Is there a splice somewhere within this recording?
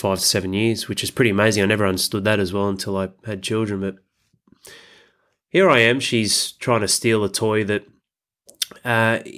no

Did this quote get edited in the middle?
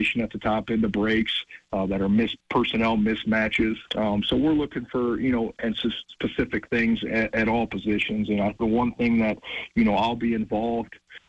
yes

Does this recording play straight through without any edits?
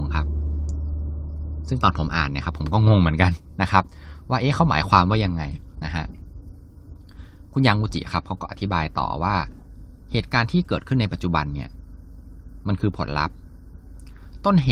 yes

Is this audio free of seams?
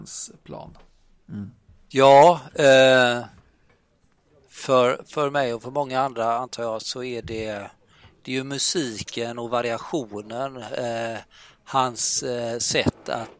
no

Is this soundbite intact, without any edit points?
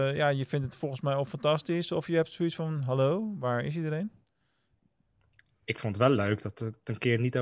yes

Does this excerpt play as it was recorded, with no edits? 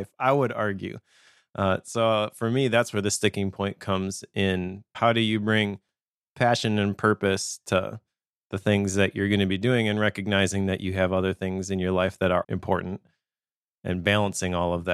no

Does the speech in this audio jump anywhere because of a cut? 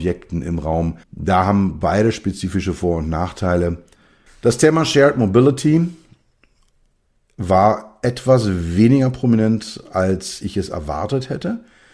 yes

